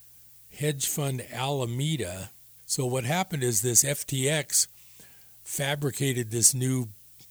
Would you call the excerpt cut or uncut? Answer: cut